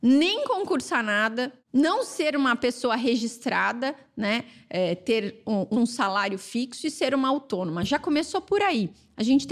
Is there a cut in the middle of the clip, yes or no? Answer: yes